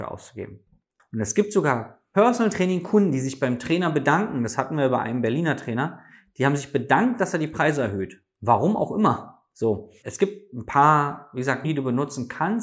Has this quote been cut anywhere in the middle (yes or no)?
yes